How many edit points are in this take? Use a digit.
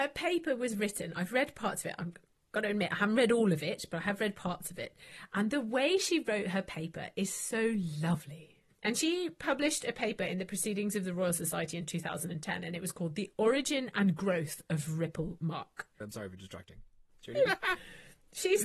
3